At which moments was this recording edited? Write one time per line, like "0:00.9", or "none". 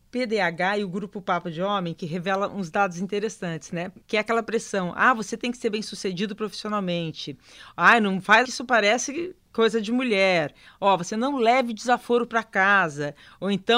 0:04.0
0:08.4